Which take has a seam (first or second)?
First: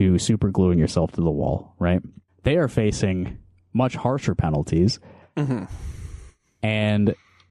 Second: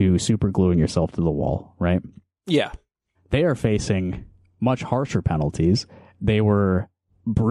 first